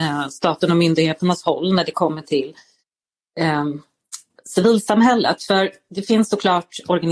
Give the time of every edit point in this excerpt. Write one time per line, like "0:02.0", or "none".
none